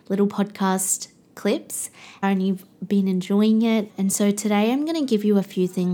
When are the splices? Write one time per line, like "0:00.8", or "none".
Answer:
0:02.2
0:03.9